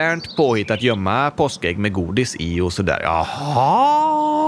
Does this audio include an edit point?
no; 0 cuts

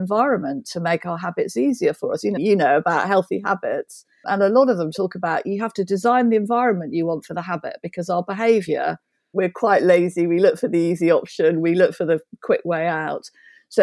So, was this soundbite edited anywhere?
yes; 1 cut; at 2.4 s

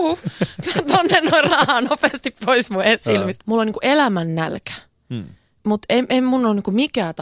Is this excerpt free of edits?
no; 1 cut; at 3.4 s

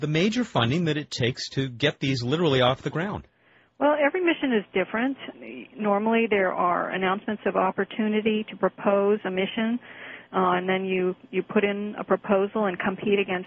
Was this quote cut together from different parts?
no; 0 cuts

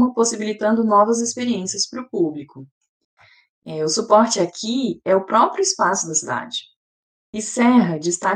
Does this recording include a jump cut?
no; 0 cuts

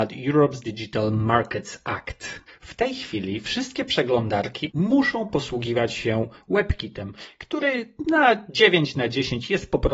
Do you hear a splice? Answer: yes; 2 cuts; at 2.5 s, 4.7 s

